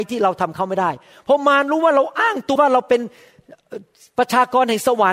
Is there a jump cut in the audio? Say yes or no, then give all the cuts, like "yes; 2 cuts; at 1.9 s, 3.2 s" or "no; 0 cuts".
yes; 1 cut; at 2.6 s